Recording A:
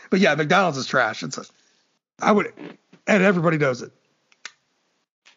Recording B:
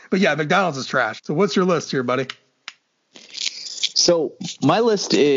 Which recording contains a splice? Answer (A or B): B